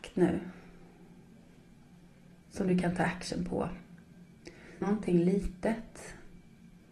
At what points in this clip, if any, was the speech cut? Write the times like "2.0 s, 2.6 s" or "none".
4.8 s

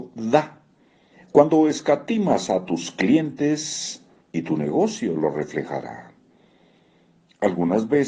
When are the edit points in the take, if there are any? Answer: 1.1 s, 4.2 s

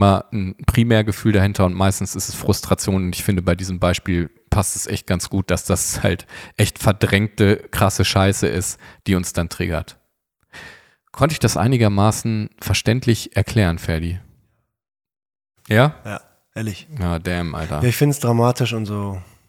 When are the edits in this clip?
15.6 s

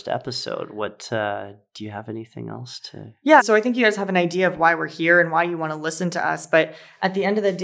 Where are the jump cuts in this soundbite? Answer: 3.4 s

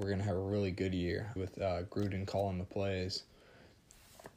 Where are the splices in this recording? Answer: 1.4 s

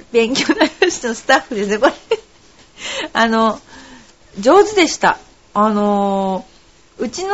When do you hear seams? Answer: 1.0 s

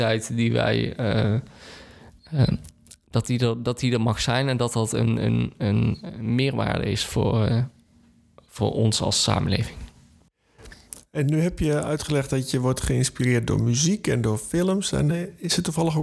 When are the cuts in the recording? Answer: none

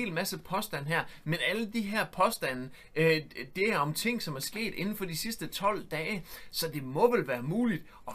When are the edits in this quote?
none

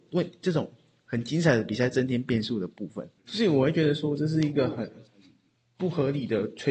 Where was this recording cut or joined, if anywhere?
3.2 s

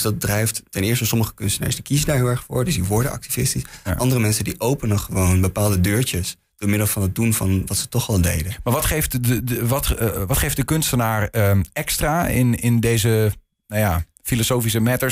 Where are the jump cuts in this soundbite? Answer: none

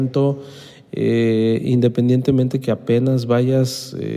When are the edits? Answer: none

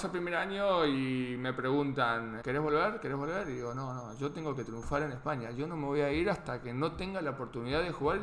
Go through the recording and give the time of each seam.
2.4 s

